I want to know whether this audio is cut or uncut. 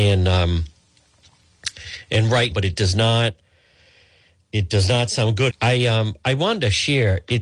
cut